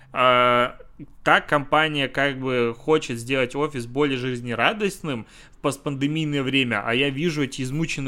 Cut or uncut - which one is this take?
uncut